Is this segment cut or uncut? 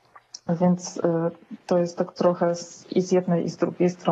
uncut